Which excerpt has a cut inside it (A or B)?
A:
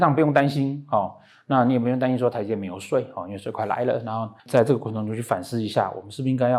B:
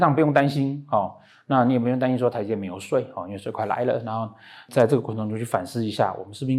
A